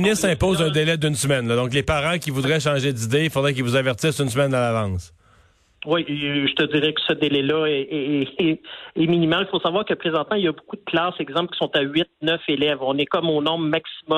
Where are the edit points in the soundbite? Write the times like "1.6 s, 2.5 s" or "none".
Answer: none